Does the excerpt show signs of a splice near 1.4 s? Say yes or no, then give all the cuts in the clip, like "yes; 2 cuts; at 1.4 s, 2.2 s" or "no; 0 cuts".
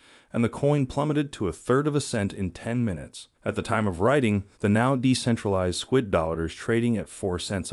no; 2 cuts; at 3.3 s, 4.5 s